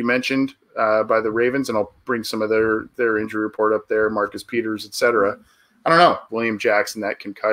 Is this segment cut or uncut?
cut